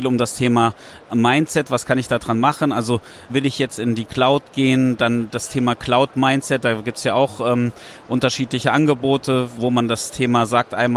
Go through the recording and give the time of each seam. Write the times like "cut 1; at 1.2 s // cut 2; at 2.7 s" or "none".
none